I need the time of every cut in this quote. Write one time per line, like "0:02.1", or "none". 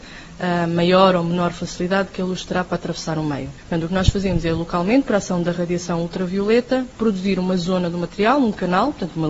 none